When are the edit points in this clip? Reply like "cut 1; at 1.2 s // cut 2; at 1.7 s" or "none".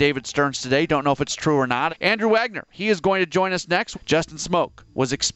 cut 1; at 1.9 s // cut 2; at 3.9 s